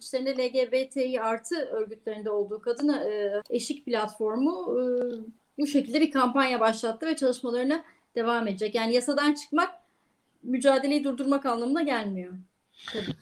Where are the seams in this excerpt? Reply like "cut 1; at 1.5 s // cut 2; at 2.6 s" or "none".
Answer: cut 1; at 3.4 s